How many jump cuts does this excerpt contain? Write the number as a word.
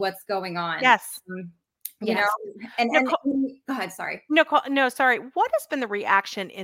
zero